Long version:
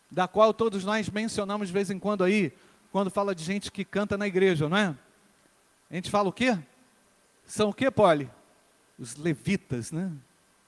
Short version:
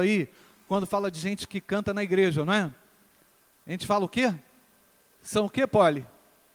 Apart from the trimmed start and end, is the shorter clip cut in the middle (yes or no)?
no